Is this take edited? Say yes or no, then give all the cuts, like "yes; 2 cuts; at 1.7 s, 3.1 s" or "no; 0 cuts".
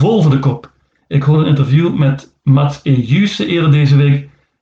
no; 0 cuts